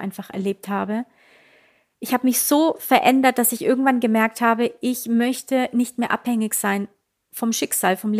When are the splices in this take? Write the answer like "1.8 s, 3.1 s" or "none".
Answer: none